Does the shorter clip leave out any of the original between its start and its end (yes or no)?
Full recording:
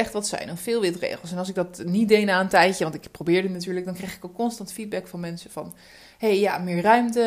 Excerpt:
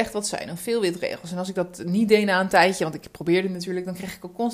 no